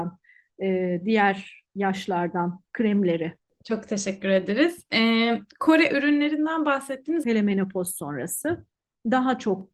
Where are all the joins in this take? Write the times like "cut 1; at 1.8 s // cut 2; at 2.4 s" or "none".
cut 1; at 7.2 s